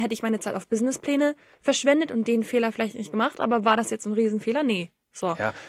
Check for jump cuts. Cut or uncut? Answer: uncut